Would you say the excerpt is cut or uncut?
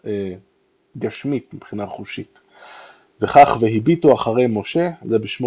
uncut